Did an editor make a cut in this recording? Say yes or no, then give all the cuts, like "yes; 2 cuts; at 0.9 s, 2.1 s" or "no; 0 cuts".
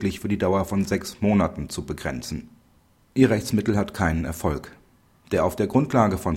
no; 0 cuts